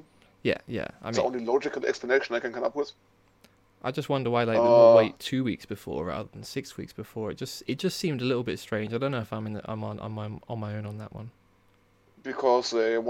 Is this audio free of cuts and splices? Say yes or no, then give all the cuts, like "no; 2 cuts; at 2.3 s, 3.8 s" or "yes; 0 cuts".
yes; 0 cuts